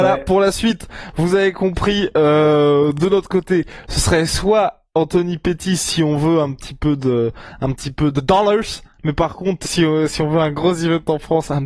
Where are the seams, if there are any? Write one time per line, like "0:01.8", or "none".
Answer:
0:08.1
0:09.6